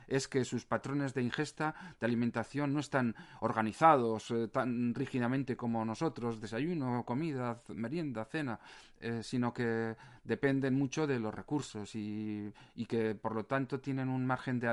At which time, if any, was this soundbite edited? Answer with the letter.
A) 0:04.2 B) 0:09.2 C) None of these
C